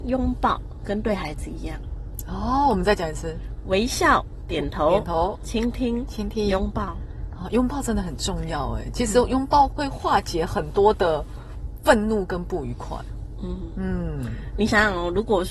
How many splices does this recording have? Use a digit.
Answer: 1